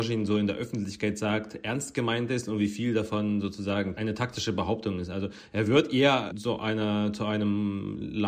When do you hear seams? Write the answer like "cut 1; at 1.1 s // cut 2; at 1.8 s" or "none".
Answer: cut 1; at 6.3 s